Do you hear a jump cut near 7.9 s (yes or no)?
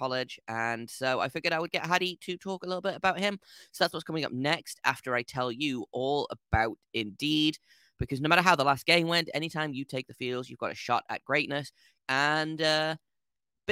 no